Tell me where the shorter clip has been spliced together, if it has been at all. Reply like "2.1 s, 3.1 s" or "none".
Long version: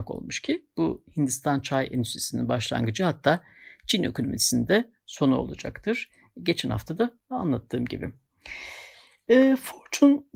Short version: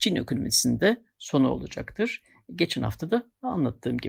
none